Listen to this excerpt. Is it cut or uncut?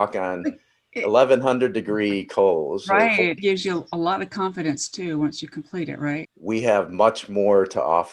cut